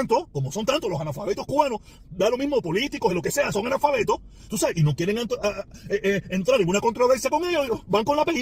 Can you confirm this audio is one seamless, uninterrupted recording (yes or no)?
no